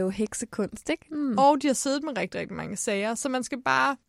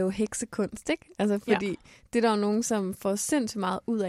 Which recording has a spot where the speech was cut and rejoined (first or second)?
first